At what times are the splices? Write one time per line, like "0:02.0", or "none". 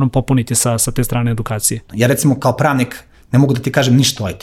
0:01.9